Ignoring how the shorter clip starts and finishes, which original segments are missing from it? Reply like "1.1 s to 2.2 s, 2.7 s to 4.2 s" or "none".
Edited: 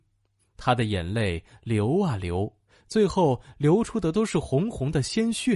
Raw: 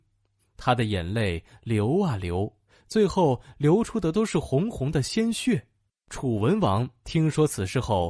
none